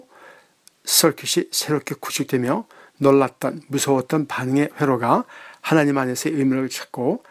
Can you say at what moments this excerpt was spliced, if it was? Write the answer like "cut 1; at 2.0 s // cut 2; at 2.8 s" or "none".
none